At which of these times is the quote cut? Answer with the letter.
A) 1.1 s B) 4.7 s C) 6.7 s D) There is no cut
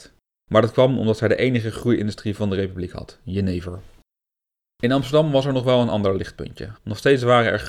C